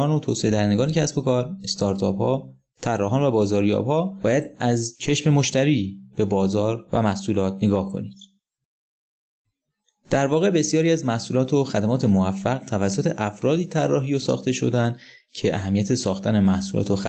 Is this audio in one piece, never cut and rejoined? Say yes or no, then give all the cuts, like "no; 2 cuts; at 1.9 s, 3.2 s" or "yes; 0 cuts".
yes; 0 cuts